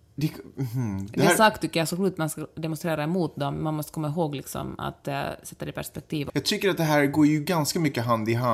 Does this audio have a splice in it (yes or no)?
yes